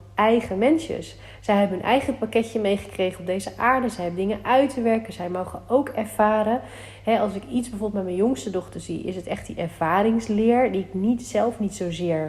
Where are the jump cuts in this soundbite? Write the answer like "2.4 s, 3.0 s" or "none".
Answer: none